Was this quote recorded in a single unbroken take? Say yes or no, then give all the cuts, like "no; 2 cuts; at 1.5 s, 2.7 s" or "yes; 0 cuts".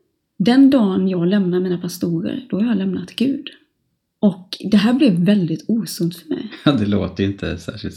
yes; 0 cuts